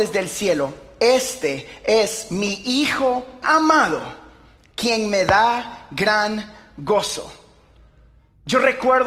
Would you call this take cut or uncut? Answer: cut